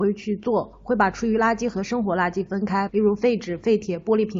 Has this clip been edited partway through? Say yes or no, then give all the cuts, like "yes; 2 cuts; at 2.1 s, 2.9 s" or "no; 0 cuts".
yes; 1 cut; at 2.9 s